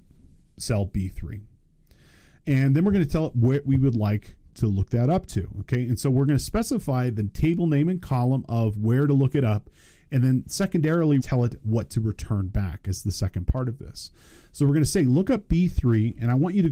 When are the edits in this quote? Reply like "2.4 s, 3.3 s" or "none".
11.2 s